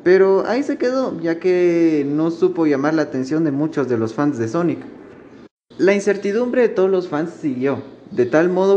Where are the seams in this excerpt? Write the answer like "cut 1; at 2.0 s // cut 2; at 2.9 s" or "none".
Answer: cut 1; at 5.7 s

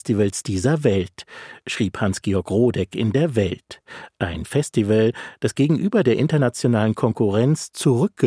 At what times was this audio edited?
none

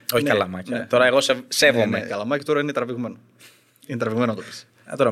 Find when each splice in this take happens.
cut 1; at 2.1 s

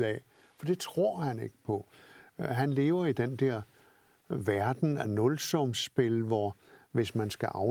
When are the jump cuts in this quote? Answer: none

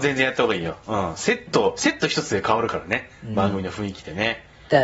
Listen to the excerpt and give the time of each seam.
none

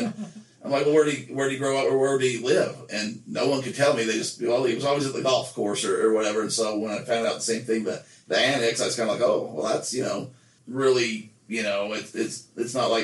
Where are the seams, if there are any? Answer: cut 1; at 10.6 s

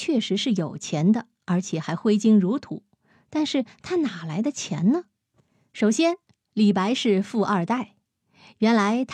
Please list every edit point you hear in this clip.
none

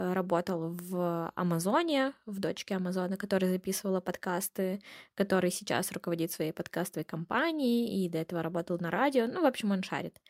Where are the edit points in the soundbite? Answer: none

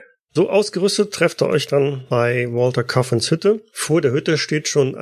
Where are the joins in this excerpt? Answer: none

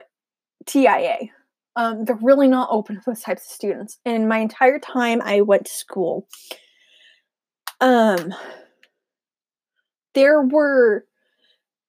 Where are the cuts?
none

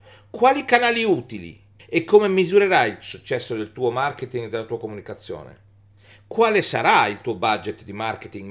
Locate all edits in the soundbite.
cut 1; at 1.8 s

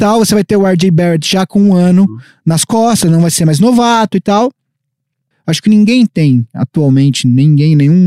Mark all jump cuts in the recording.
cut 1; at 5.3 s

